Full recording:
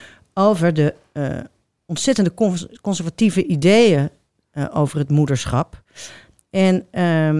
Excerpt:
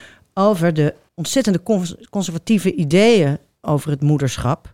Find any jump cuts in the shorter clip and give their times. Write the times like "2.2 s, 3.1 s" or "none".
1.1 s, 3.6 s